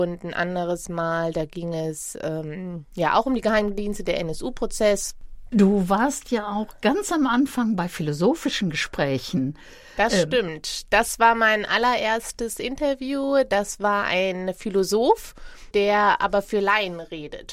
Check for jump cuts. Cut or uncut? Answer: uncut